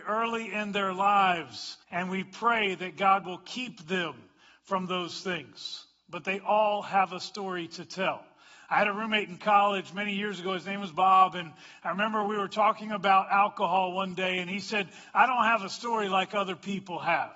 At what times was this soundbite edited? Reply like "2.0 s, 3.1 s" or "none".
1.8 s